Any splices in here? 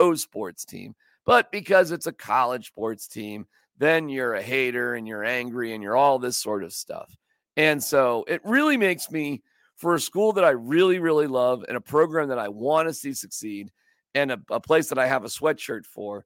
no; 0 cuts

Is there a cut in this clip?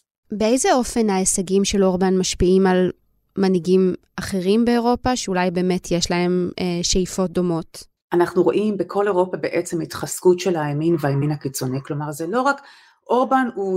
yes; 1 cut; at 8.0 s

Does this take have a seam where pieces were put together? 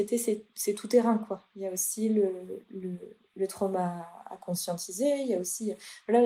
no; 0 cuts

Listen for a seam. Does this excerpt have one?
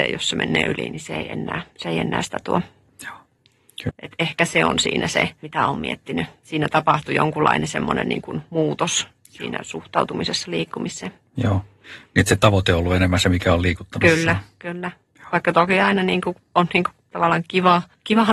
yes; 1 cut; at 3.9 s

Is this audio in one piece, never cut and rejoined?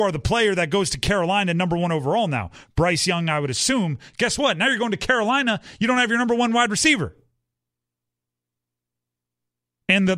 yes; 0 cuts

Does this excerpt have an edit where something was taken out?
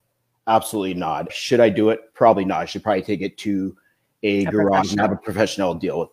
yes; 1 cut; at 1.3 s

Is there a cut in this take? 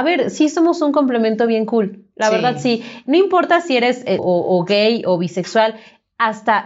yes; 1 cut; at 4.2 s

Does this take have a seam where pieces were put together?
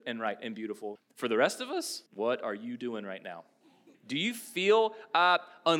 yes; 3 cuts; at 1.0 s, 2.1 s, 3.9 s

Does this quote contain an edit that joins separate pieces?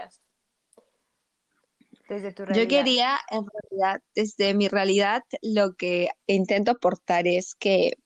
no; 0 cuts

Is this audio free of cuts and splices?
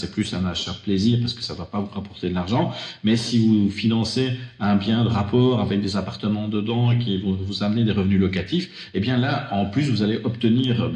yes; 0 cuts

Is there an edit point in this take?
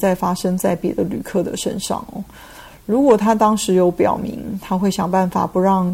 no; 0 cuts

